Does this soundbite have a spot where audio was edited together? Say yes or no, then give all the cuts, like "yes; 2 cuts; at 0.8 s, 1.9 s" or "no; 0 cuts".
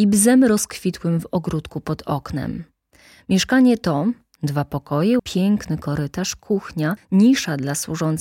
yes; 1 cut; at 5.2 s